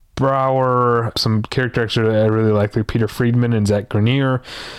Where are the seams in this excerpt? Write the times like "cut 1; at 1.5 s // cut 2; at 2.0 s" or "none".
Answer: cut 1; at 1.1 s